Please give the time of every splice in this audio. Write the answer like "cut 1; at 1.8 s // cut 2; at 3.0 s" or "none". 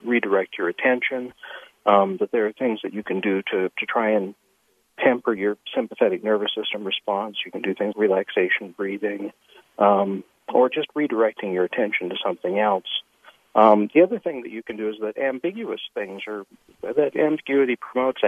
cut 1; at 7.9 s

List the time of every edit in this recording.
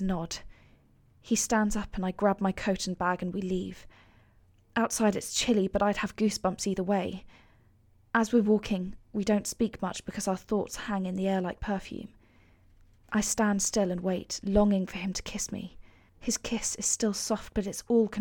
cut 1; at 13.0 s // cut 2; at 16.1 s

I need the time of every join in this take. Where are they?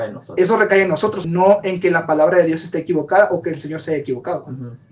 cut 1; at 1.2 s

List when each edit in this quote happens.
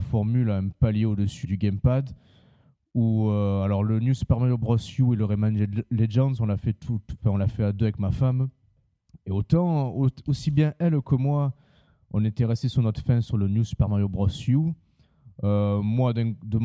cut 1; at 1.4 s

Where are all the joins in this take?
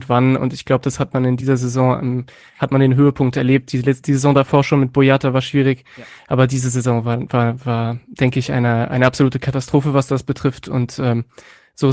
none

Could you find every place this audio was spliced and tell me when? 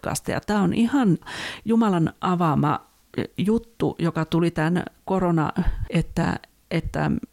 cut 1; at 5.9 s

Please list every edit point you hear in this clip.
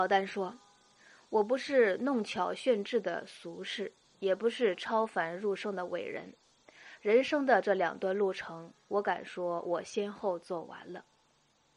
none

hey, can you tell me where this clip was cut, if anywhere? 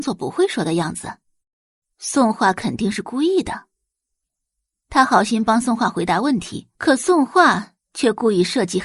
cut 1; at 6.7 s

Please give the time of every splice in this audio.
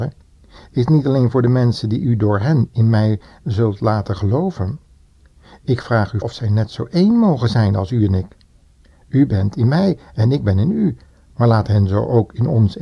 cut 1; at 6.2 s

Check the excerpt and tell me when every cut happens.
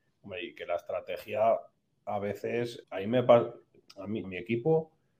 cut 1; at 2.8 s // cut 2; at 4.2 s

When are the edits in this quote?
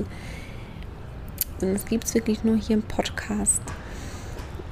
cut 1; at 1.6 s

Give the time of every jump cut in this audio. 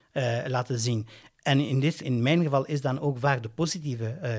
cut 1; at 2.0 s

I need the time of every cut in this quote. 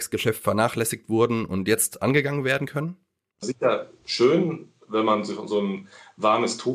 cut 1; at 3.4 s

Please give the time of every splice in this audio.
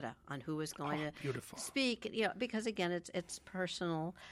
none

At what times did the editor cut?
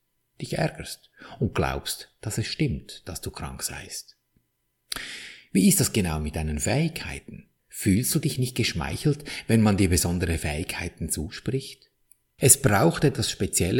cut 1; at 7.6 s // cut 2; at 12.4 s

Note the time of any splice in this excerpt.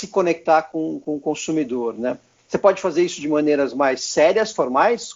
none

